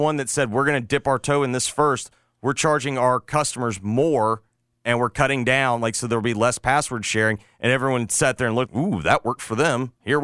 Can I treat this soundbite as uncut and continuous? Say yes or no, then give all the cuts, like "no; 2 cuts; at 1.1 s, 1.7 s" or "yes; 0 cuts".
no; 1 cut; at 8.7 s